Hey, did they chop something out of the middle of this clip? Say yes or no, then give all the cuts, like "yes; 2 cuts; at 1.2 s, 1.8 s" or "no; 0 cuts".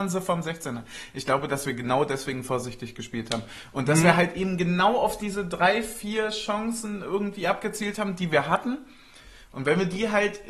no; 0 cuts